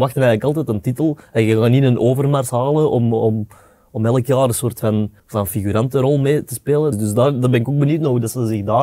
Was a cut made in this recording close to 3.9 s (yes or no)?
no